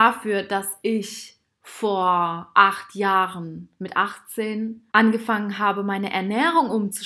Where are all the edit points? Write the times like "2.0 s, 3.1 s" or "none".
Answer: 4.9 s